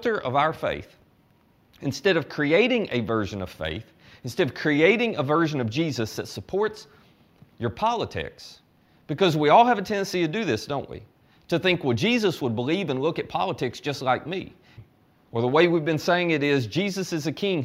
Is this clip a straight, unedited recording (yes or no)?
no